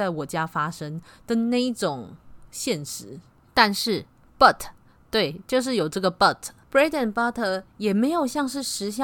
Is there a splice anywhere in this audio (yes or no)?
no